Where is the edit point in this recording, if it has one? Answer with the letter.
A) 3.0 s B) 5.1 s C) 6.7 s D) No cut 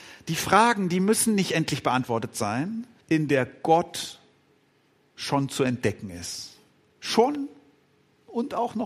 A